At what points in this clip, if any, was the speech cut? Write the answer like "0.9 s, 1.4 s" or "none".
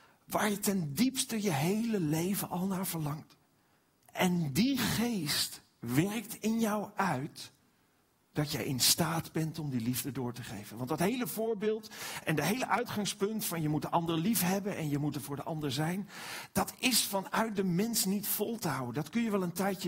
4.0 s